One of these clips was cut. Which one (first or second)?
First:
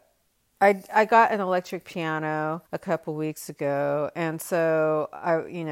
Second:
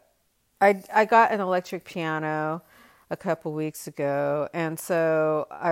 first